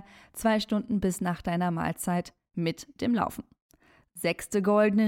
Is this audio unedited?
yes; 0 cuts

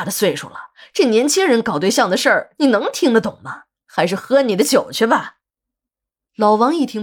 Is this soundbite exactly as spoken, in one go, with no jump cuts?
yes; 0 cuts

